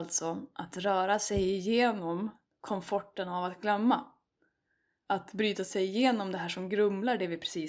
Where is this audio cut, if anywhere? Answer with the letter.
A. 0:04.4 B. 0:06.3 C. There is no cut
C